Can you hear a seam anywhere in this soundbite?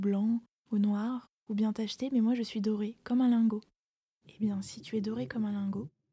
no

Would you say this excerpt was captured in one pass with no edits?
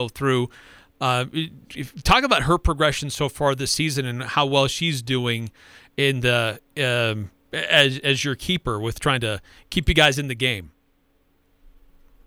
yes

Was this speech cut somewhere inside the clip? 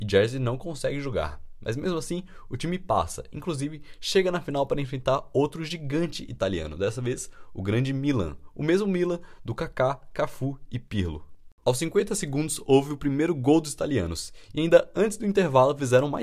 yes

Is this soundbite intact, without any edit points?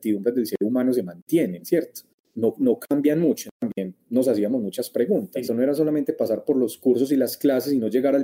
no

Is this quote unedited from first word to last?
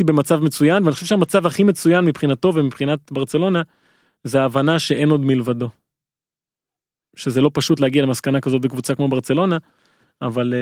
yes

